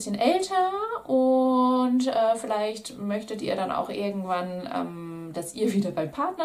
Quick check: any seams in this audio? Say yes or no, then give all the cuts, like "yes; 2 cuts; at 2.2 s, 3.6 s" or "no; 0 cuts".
no; 0 cuts